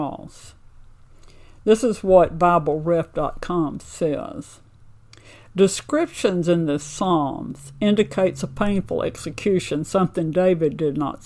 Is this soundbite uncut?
yes; 0 cuts

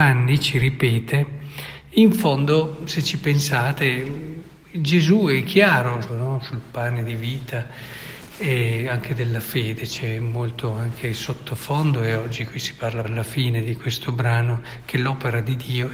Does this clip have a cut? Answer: yes; 2 cuts; at 6.1 s, 13.0 s

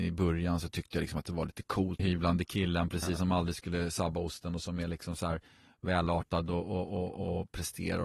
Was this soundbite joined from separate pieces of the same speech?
yes; 1 cut; at 2.0 s

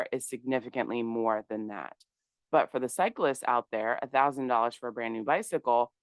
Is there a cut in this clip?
no; 0 cuts

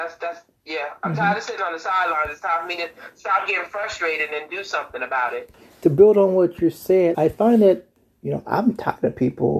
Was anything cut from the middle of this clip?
yes; 1 cut; at 7.1 s

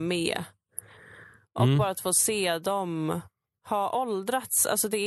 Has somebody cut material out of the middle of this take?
no; 0 cuts

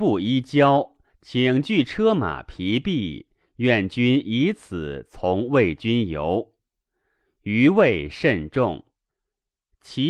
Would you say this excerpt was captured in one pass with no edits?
yes; 0 cuts

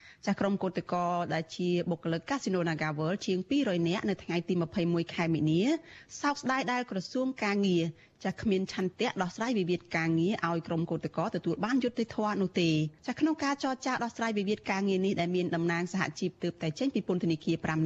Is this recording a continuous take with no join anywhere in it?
no; 1 cut; at 13.0 s

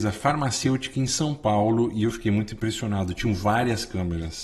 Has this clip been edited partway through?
no; 0 cuts

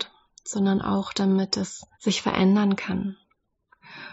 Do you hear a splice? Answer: yes; 1 cut; at 1.9 s

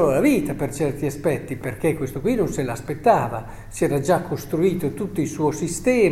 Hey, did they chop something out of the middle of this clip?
no; 0 cuts

